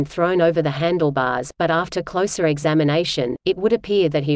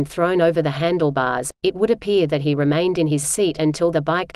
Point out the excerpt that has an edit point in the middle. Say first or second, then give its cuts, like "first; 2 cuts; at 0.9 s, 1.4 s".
second; 1 cut; at 1.6 s